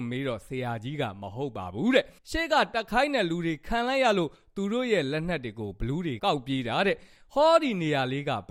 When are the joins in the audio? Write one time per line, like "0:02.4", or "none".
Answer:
0:02.2
0:06.2